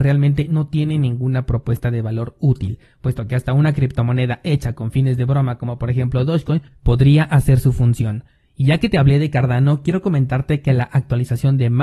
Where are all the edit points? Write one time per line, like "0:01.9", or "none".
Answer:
none